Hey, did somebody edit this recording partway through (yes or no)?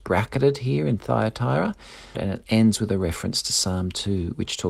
yes